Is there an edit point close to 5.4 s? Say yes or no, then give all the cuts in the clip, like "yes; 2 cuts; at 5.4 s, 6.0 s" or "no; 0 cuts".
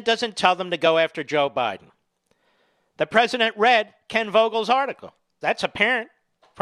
yes; 1 cut; at 5.4 s